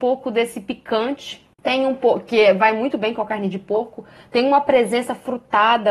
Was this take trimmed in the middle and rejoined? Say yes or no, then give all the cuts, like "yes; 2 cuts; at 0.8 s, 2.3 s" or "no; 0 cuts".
yes; 1 cut; at 1.5 s